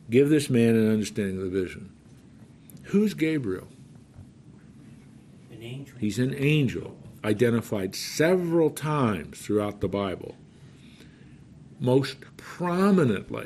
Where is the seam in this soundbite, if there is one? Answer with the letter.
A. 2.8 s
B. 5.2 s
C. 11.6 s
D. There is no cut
D